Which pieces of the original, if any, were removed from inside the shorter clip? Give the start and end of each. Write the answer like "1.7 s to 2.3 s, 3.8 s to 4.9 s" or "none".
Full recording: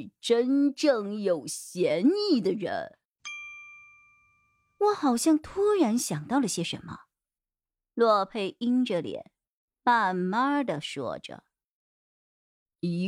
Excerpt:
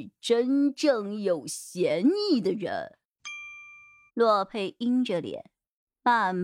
4.1 s to 7.9 s